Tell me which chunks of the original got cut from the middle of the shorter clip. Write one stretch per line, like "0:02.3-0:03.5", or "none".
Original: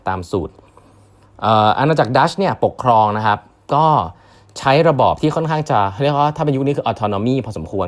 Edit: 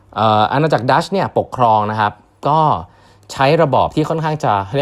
none